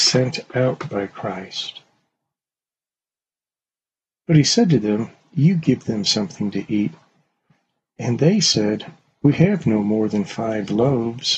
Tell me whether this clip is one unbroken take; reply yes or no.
yes